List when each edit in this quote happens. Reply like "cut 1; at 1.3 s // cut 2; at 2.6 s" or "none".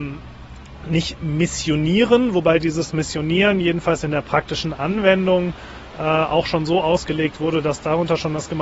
none